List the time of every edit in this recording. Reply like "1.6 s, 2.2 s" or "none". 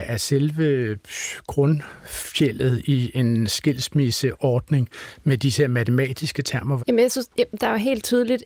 6.8 s